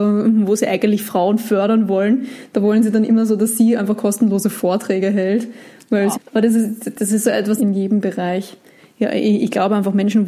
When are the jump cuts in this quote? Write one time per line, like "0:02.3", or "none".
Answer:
0:06.1
0:07.6